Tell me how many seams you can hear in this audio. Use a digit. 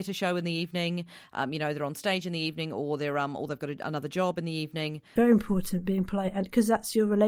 1